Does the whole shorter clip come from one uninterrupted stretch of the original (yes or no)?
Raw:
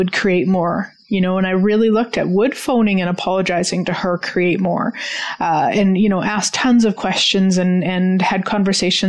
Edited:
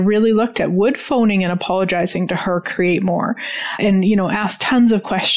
no